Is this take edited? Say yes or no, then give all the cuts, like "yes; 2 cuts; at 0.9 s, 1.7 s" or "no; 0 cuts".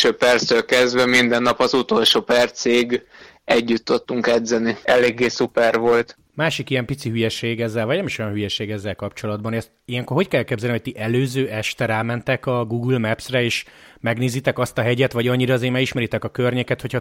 yes; 1 cut; at 4.8 s